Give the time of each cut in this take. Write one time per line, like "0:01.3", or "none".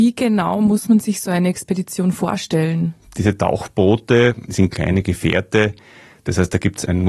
none